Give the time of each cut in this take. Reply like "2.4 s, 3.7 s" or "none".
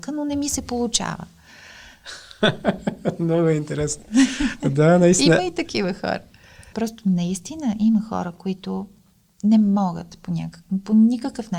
6.7 s